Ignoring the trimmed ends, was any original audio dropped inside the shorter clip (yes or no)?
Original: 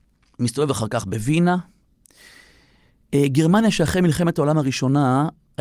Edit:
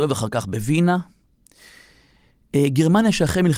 no